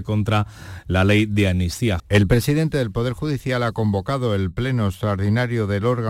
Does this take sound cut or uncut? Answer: cut